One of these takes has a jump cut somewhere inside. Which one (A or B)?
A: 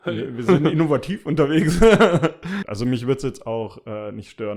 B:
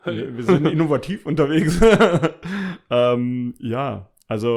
A